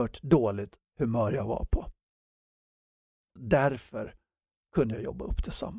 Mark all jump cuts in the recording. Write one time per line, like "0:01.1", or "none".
0:03.4